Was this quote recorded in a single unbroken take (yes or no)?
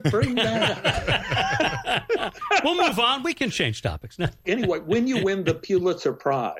no